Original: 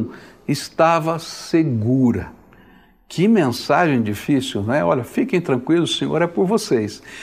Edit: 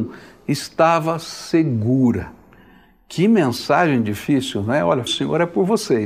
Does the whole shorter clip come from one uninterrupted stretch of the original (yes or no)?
no